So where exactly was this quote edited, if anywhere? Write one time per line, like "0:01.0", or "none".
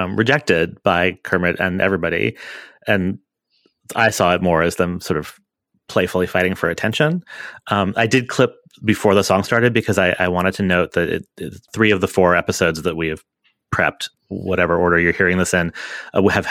0:11.7
0:14.2